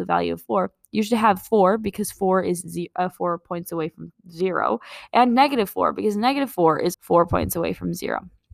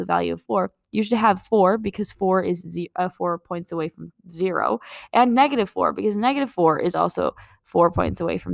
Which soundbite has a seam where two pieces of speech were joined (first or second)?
first